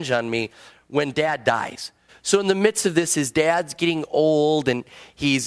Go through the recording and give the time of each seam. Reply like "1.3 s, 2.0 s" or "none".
2.1 s